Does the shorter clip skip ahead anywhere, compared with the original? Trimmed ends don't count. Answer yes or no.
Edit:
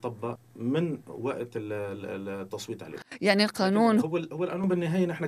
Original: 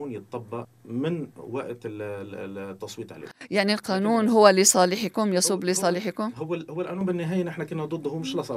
yes